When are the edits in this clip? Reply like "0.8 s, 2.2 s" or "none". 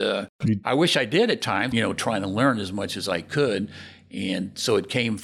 1.7 s

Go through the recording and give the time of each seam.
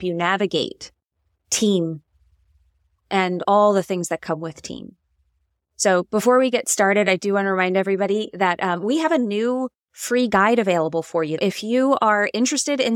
none

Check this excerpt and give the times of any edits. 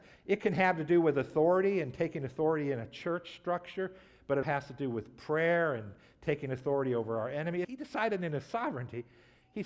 4.4 s, 7.6 s

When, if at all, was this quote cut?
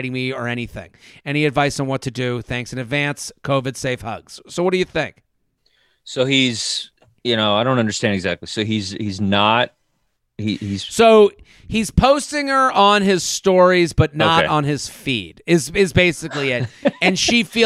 none

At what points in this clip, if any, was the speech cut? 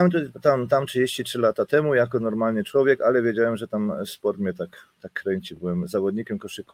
none

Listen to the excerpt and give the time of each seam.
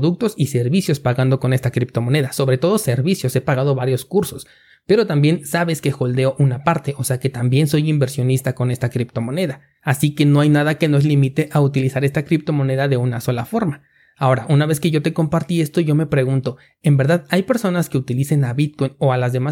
none

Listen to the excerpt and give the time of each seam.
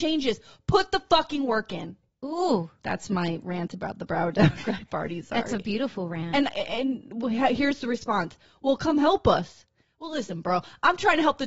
none

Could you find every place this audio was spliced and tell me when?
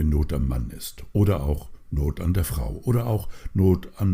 none

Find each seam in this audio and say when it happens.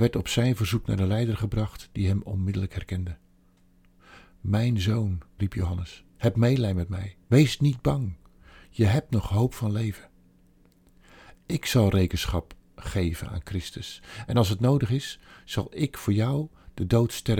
5.4 s

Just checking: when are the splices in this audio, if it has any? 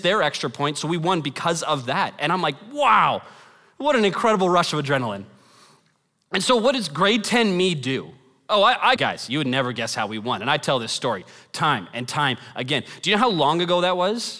9.0 s

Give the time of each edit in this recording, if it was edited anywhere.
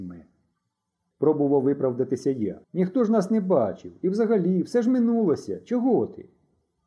1.1 s, 2.6 s

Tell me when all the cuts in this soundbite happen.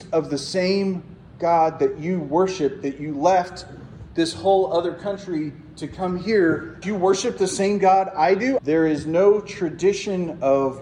6.8 s, 8.6 s

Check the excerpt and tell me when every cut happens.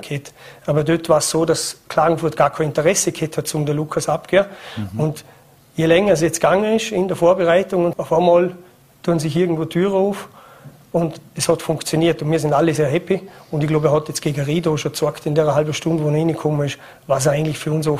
7.9 s, 12.8 s

